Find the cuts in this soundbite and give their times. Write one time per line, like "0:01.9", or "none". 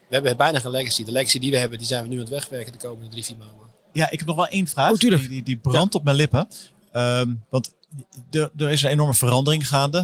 0:03.9